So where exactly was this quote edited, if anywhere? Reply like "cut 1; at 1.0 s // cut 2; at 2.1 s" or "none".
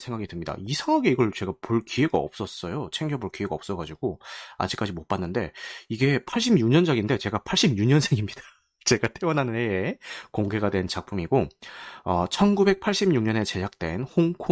none